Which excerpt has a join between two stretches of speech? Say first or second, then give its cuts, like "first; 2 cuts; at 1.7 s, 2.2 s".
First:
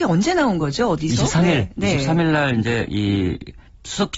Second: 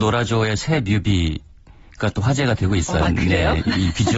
second; 1 cut; at 3.0 s